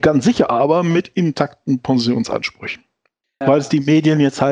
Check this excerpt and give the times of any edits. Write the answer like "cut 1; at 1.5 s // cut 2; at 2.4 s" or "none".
cut 1; at 3.4 s

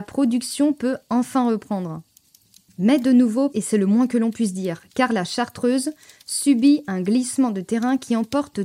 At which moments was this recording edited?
cut 1; at 3.5 s

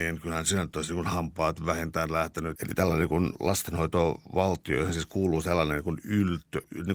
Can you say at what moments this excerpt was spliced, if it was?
cut 1; at 2.6 s

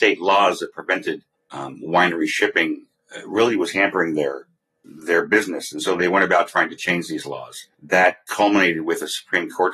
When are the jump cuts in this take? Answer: none

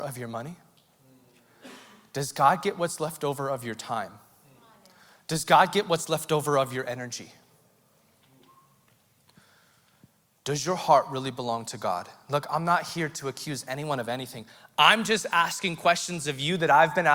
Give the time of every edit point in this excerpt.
none

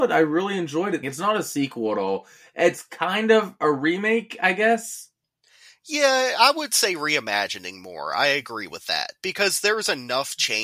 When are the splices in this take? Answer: cut 1; at 1.0 s

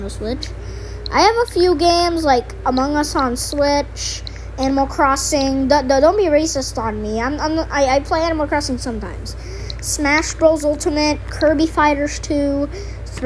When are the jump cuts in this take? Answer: none

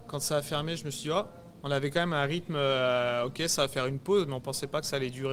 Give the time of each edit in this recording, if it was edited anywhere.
cut 1; at 1.6 s

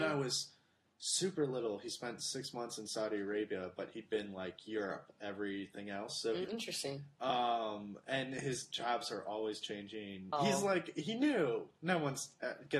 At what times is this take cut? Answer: cut 1; at 6.4 s // cut 2; at 10.3 s

